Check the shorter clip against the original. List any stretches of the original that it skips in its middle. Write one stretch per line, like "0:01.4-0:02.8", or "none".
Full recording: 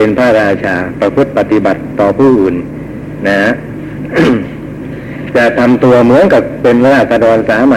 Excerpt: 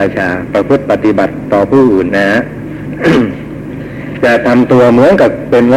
0:02.6-0:03.2